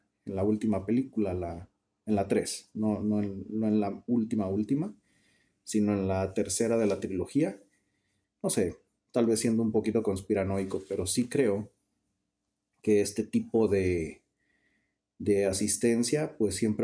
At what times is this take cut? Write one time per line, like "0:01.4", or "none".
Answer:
0:08.2